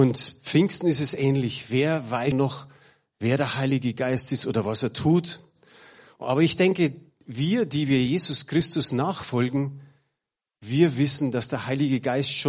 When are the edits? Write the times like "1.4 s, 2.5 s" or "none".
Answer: 2.3 s